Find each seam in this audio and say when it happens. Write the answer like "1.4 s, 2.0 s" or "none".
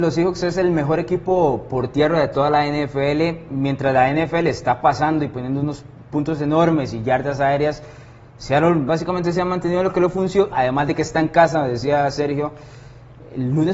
10.5 s